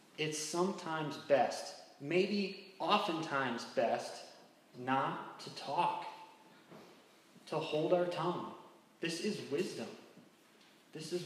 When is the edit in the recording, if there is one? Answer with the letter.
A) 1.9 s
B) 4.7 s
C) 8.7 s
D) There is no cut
B